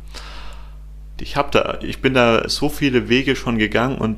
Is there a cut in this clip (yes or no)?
yes